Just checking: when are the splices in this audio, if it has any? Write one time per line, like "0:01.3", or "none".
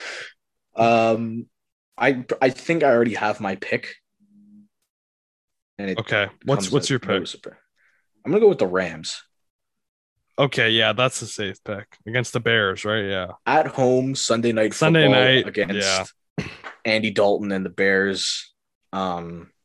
none